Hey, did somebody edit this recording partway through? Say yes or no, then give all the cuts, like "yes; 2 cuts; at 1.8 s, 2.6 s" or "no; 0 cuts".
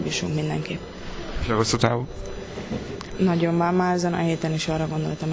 yes; 1 cut; at 3.1 s